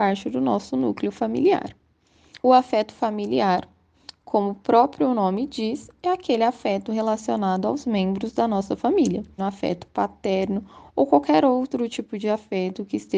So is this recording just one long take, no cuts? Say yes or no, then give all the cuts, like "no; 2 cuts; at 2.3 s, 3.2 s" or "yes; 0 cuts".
no; 2 cuts; at 2.4 s, 9.4 s